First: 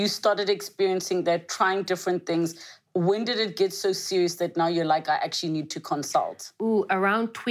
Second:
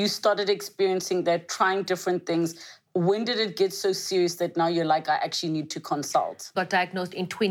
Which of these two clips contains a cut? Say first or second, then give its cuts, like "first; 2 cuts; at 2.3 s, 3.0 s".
second; 1 cut; at 6.5 s